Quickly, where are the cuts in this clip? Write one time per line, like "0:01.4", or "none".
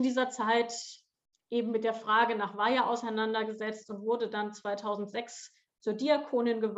none

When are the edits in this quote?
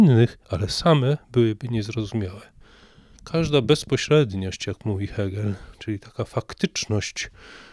0:03.1

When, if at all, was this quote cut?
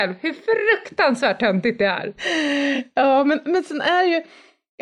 none

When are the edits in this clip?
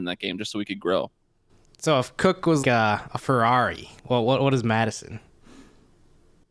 0:02.6
0:04.0

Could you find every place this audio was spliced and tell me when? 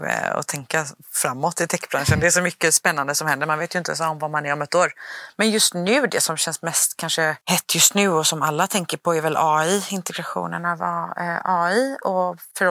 none

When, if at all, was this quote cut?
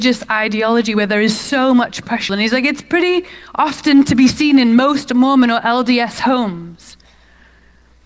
0:02.3

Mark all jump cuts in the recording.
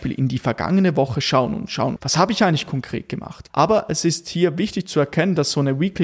0:02.0
0:03.5

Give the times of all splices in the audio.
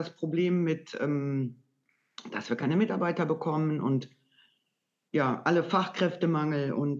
none

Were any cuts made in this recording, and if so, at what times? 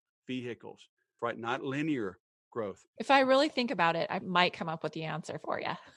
0:01.2
0:03.0
0:04.2

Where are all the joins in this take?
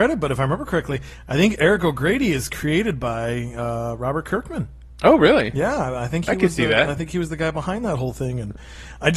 none

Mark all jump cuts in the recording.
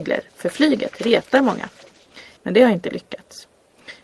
0:02.4

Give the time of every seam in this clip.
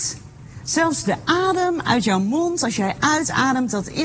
none

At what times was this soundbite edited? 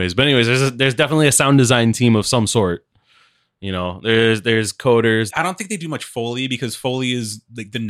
0:05.3

